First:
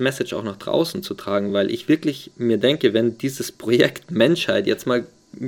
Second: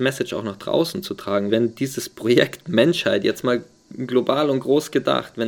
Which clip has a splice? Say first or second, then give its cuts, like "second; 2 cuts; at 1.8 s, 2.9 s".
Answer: second; 1 cut; at 1.5 s